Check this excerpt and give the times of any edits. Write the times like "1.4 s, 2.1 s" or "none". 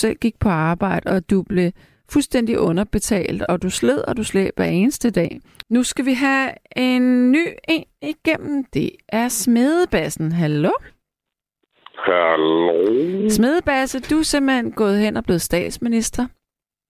5.6 s